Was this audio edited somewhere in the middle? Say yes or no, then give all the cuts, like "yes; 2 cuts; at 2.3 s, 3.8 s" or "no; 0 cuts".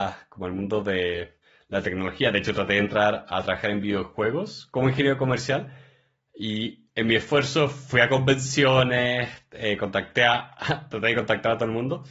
no; 0 cuts